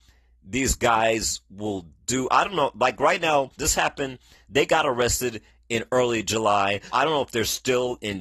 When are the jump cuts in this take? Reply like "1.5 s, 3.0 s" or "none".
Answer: 3.6 s, 6.9 s